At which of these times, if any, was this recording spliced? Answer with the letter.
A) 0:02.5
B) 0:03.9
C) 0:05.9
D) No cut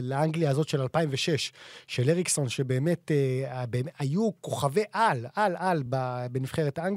D